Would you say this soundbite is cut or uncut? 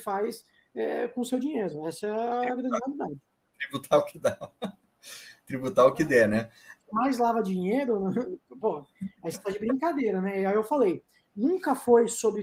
cut